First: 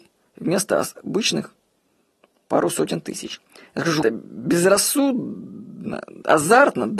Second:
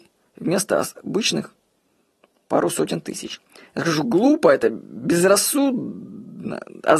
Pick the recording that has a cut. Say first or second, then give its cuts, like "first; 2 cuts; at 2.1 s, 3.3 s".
first; 1 cut; at 4.0 s